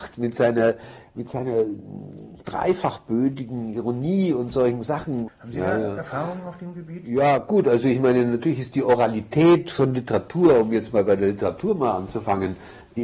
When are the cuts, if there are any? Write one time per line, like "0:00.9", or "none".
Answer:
0:05.3